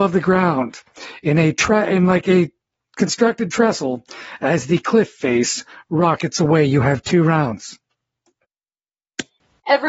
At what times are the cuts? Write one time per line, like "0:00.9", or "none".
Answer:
none